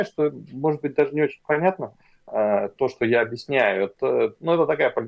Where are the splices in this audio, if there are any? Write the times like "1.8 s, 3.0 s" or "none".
none